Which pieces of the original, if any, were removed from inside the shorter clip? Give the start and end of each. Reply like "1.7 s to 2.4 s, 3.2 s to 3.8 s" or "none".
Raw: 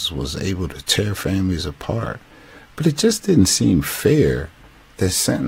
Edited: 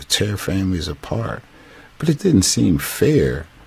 2.9 s to 3.2 s